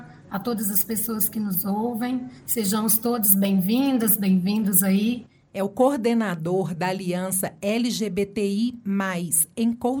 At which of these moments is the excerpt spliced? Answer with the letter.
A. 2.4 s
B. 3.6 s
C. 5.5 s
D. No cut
C